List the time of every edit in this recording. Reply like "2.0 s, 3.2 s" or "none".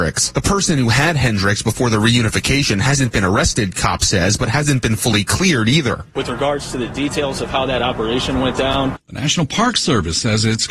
9.0 s